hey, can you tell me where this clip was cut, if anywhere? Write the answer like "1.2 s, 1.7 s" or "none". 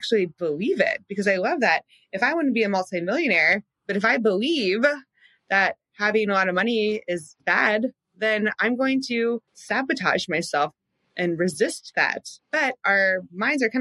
9.5 s, 12.4 s